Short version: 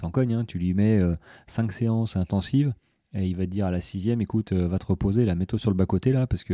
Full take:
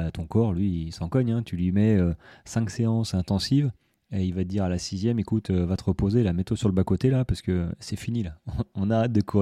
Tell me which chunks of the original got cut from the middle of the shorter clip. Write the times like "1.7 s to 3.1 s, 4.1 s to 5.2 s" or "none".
none